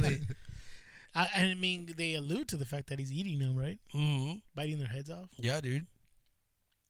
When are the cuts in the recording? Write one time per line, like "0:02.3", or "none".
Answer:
0:04.5